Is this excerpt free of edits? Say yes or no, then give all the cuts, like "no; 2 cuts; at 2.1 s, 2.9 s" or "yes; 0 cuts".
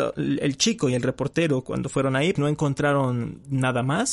no; 1 cut; at 2.4 s